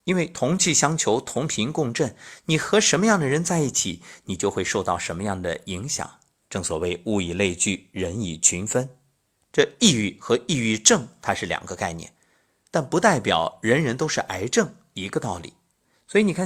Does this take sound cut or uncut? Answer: cut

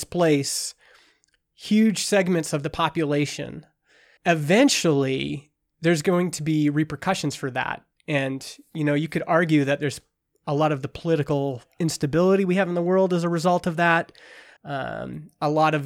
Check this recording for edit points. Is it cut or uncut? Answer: cut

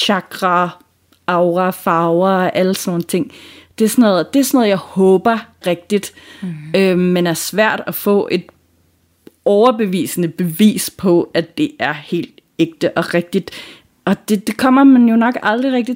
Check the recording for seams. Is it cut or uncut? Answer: cut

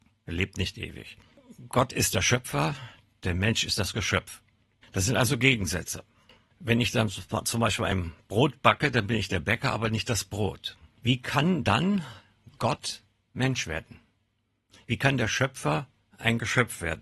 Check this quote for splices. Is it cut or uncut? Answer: uncut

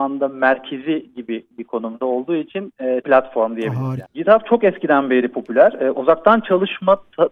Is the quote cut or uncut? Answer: cut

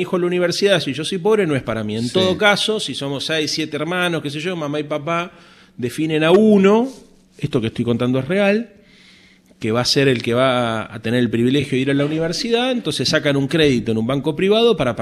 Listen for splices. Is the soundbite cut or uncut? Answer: uncut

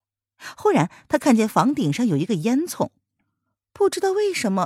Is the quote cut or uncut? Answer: uncut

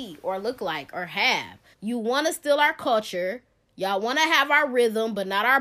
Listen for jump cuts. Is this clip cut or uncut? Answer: cut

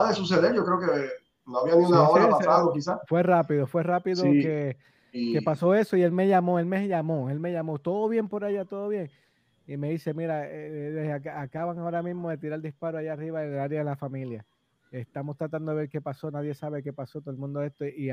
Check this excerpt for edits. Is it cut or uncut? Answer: uncut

